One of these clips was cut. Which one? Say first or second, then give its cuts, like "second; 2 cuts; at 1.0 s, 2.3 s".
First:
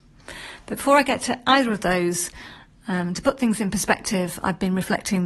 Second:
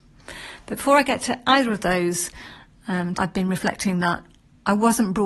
second; 1 cut; at 3.1 s